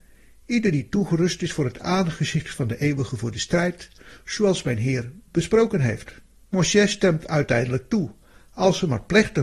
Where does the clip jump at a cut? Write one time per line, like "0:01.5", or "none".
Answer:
0:06.4